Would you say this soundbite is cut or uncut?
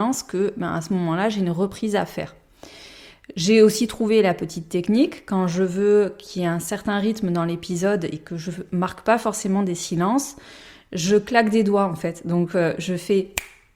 uncut